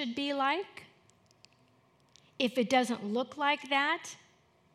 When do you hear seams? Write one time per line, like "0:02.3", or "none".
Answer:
none